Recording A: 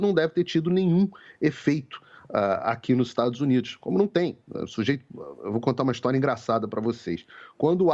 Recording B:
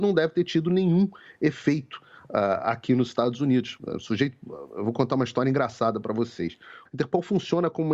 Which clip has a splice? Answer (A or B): B